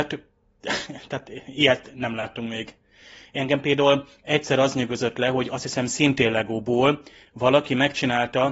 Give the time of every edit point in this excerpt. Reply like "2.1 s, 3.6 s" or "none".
none